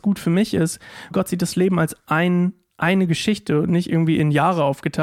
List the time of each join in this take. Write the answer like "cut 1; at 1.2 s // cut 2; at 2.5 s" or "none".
cut 1; at 1.1 s